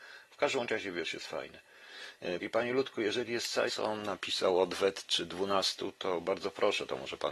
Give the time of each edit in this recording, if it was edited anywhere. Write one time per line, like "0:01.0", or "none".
0:02.4
0:03.7